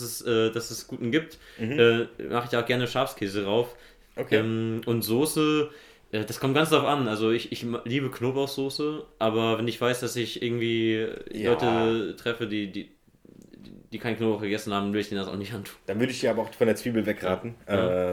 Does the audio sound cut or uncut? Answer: uncut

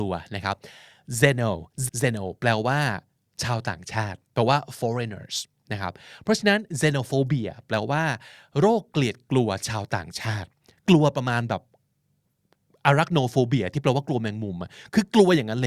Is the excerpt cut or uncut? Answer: cut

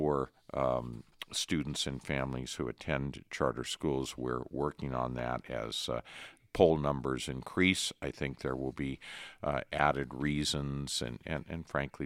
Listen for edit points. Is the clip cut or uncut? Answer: uncut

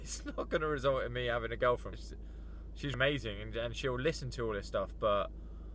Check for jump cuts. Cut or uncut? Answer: cut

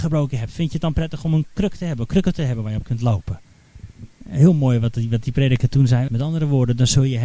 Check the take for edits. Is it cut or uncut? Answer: cut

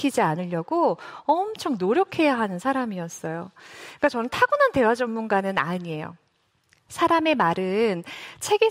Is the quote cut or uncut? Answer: uncut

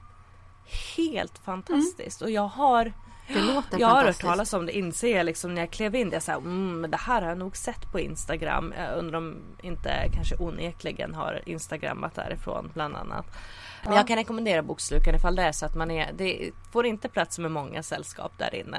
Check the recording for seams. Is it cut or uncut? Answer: cut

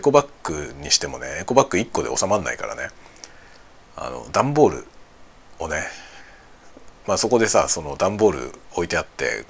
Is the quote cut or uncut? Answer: uncut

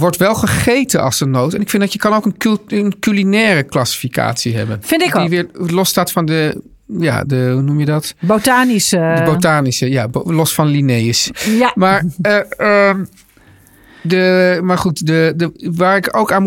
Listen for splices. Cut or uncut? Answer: uncut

